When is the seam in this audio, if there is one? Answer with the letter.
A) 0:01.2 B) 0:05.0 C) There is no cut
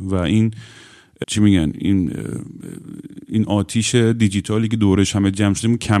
A